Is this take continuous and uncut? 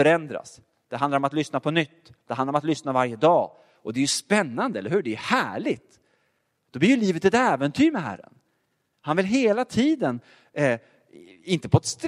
yes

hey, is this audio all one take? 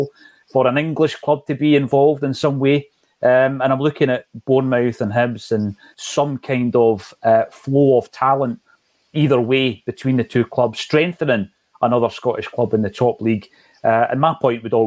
no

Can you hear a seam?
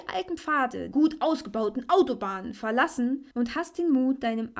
yes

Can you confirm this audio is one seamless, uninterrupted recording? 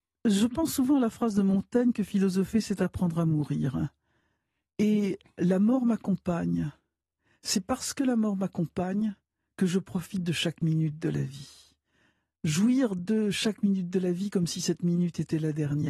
yes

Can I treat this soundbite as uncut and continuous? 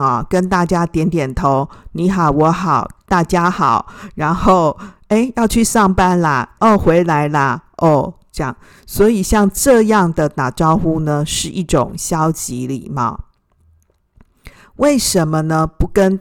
no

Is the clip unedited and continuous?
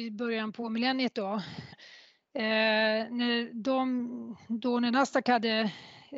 no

